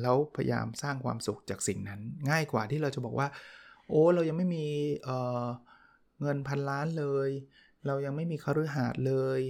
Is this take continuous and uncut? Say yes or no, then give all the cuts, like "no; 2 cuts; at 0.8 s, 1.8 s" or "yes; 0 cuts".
yes; 0 cuts